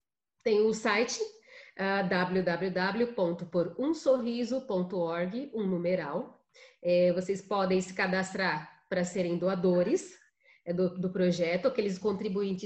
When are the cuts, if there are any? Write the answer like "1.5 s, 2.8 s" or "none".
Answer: none